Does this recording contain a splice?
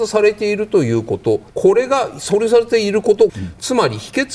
yes; 2 cuts; at 1.5 s, 3.3 s

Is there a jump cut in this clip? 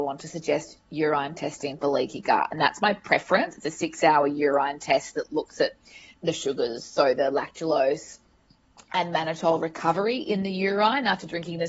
yes; 1 cut; at 6.1 s

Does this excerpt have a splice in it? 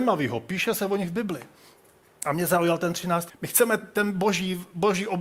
yes; 1 cut; at 3.3 s

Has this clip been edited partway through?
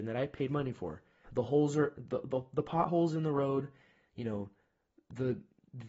yes; 1 cut; at 1.2 s

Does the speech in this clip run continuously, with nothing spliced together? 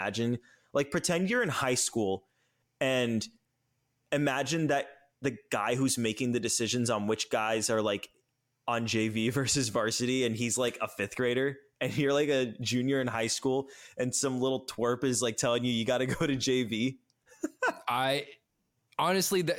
yes; 0 cuts

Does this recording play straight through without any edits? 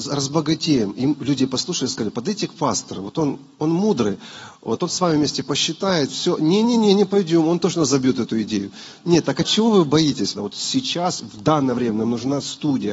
no; 1 cut; at 10.4 s

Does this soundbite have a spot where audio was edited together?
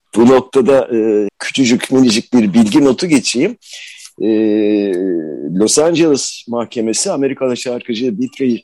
yes; 1 cut; at 1.3 s

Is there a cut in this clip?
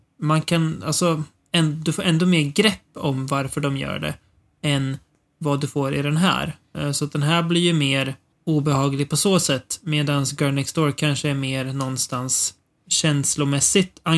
no; 0 cuts

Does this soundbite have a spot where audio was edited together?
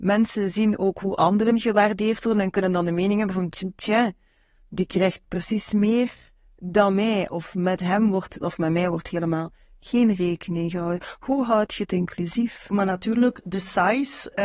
yes; 2 cuts; at 8.4 s, 12.7 s

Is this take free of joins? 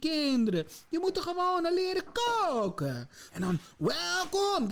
no; 1 cut; at 3.3 s

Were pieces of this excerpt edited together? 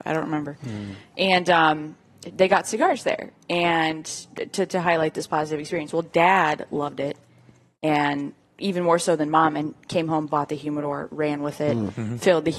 no; 0 cuts

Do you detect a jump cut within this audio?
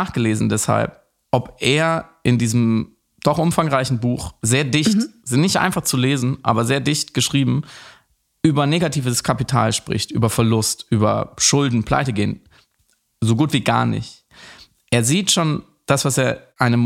no; 0 cuts

